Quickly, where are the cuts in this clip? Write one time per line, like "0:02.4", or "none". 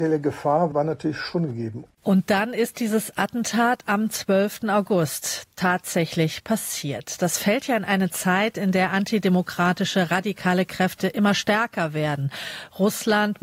none